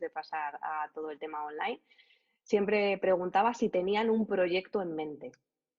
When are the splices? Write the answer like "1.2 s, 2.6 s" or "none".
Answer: none